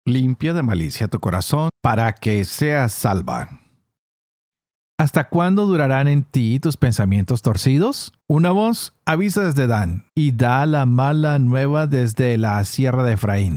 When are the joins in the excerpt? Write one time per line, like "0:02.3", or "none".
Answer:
0:01.7
0:08.2
0:10.1